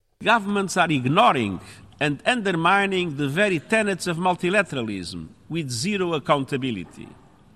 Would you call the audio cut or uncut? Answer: uncut